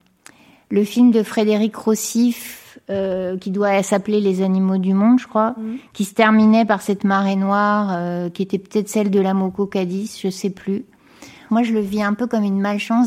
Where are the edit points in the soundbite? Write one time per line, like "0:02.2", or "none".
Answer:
0:11.5